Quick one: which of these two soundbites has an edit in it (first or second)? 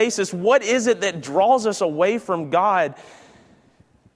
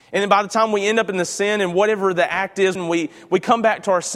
second